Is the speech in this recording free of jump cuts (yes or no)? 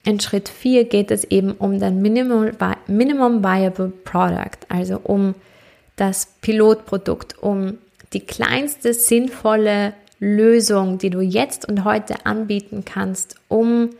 yes